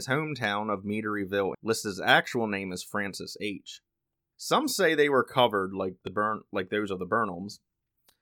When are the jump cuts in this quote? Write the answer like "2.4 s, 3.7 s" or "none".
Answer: 1.5 s, 4.3 s